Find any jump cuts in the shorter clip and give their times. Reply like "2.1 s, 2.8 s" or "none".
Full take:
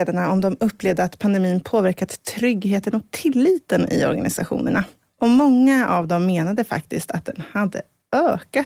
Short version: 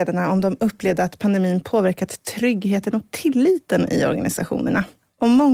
none